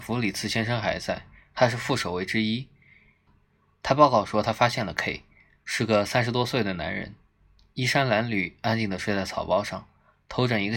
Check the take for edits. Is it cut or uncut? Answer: cut